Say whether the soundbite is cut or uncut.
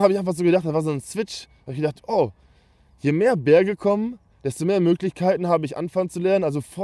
uncut